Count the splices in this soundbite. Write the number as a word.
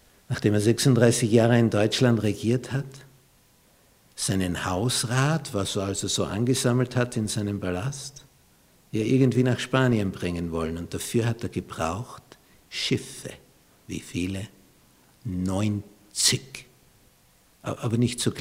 zero